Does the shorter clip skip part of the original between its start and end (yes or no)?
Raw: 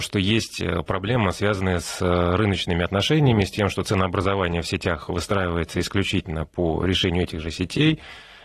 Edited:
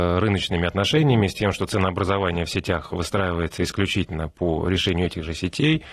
no